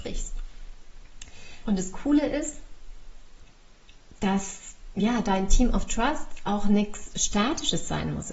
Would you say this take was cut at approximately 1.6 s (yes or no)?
yes